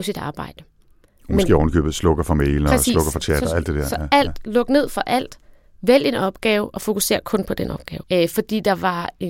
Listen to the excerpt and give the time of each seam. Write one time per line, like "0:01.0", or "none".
0:08.0